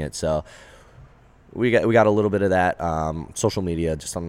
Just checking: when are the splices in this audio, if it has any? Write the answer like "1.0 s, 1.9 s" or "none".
none